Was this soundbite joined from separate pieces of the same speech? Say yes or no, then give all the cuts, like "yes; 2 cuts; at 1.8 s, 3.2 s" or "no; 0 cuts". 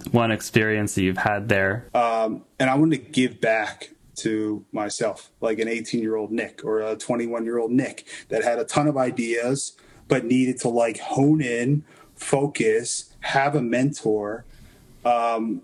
yes; 1 cut; at 1.9 s